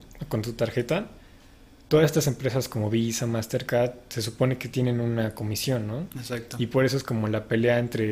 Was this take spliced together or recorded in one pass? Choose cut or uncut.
uncut